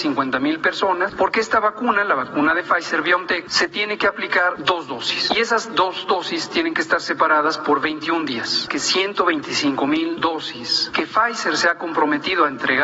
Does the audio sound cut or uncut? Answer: cut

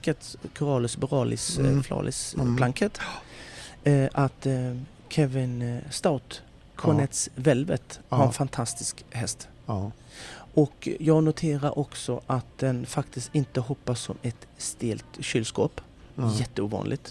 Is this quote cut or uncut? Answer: uncut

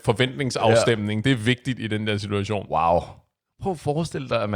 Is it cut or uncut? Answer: uncut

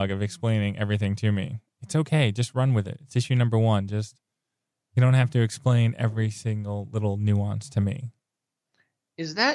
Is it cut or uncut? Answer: uncut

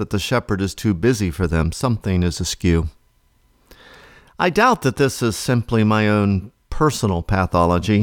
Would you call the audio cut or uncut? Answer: uncut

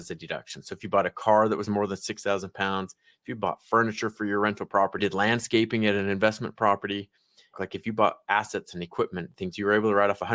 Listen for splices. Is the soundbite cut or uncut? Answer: cut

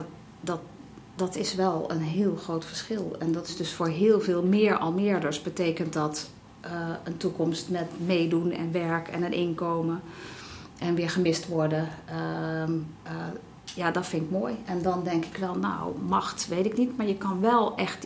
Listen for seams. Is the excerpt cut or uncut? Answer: uncut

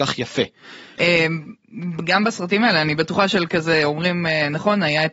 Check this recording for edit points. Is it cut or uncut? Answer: cut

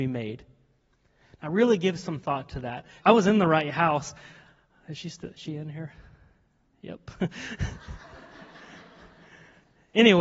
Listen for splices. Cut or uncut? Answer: cut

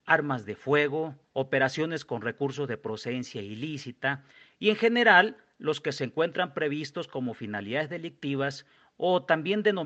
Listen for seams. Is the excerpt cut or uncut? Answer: cut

